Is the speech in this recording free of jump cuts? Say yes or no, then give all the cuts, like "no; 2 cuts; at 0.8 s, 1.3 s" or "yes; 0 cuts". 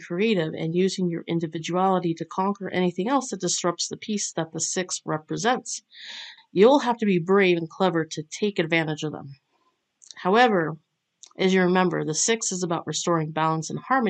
no; 1 cut; at 6.4 s